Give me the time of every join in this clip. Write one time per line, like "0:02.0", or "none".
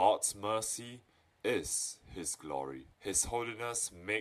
0:02.9